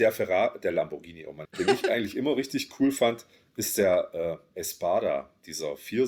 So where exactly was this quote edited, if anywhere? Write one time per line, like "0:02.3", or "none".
0:01.5